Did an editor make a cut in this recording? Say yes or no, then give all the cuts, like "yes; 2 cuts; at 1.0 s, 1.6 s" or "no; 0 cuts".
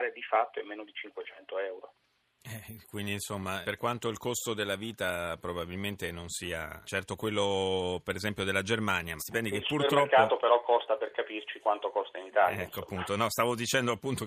yes; 3 cuts; at 3.6 s, 6.8 s, 9.2 s